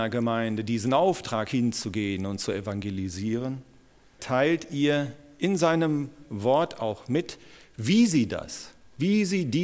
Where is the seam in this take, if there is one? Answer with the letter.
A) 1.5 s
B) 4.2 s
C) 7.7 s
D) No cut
B